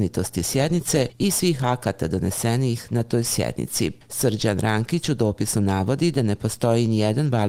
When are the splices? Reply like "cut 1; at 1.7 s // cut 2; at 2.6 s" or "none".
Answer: none